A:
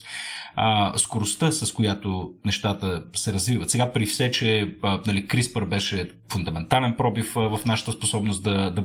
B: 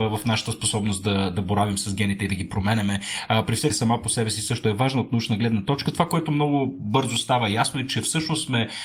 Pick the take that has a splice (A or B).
B